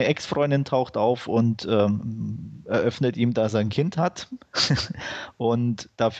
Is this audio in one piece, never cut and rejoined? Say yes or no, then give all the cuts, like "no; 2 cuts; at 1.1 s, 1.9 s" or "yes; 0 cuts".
yes; 0 cuts